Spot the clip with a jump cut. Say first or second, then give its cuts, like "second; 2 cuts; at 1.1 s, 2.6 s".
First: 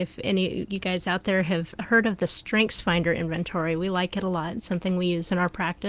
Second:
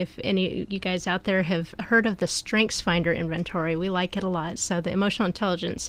second; 1 cut; at 4.6 s